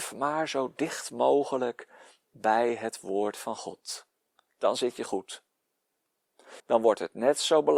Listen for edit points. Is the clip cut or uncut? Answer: cut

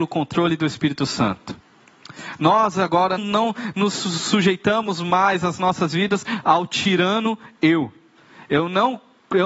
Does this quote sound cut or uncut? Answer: cut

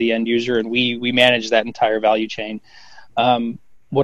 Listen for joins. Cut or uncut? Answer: uncut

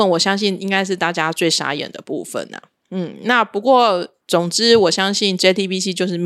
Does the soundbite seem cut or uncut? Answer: uncut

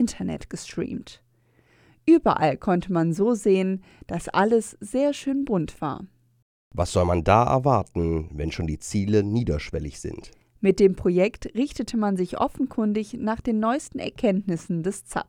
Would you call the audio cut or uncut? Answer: uncut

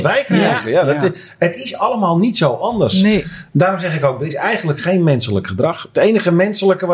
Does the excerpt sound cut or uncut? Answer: uncut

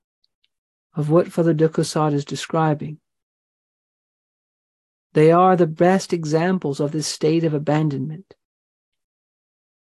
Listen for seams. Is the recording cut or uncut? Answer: uncut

